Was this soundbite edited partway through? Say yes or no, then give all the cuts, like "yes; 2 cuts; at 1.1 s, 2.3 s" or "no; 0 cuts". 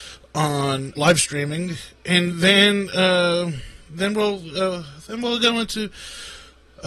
yes; 1 cut; at 1.0 s